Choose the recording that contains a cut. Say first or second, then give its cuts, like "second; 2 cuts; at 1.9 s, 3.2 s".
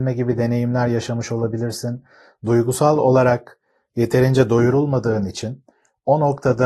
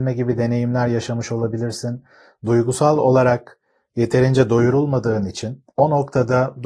second; 1 cut; at 5.7 s